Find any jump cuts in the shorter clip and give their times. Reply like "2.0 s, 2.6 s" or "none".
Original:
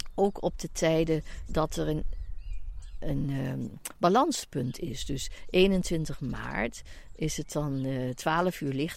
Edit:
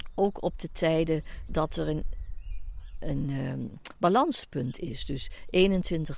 none